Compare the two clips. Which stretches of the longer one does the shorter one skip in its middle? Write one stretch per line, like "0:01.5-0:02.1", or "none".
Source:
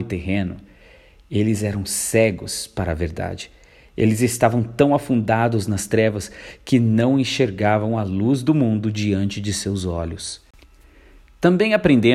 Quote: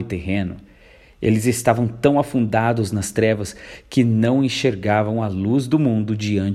0:01.0-0:03.8